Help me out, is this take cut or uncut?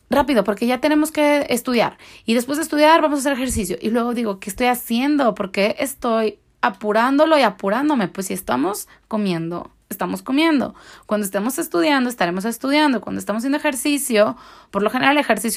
uncut